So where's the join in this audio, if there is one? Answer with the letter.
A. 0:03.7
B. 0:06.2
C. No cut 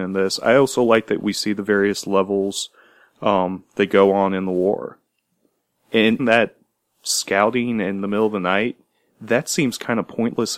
B